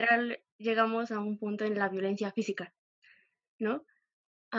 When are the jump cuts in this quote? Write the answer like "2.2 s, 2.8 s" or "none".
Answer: none